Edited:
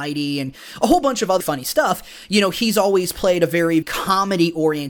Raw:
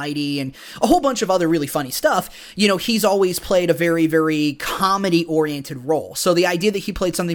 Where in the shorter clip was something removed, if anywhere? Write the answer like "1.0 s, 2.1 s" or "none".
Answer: 1.4 s, 3.8 s